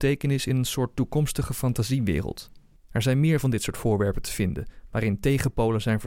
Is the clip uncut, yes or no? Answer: no